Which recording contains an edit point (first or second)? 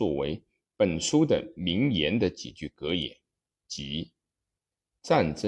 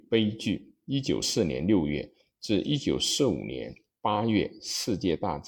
second